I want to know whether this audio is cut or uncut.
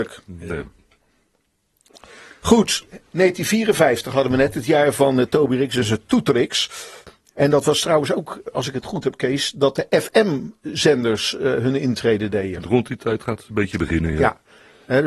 uncut